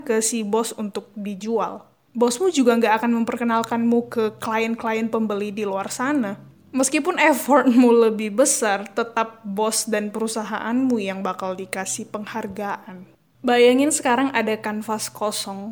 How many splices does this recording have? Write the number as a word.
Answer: two